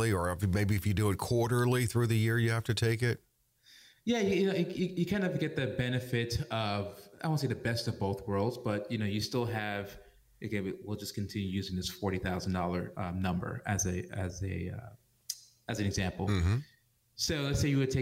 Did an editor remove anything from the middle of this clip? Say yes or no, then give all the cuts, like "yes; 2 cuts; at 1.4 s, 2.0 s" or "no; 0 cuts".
no; 0 cuts